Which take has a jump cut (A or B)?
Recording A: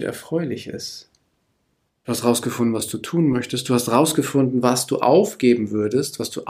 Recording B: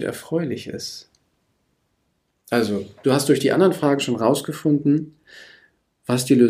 A